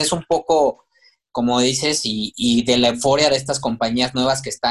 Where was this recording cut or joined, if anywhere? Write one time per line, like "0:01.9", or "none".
none